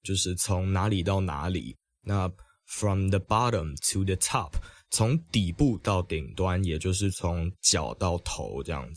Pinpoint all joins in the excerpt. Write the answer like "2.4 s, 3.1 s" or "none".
7.1 s